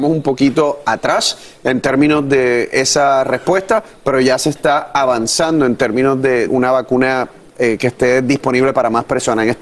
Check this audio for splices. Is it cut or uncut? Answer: cut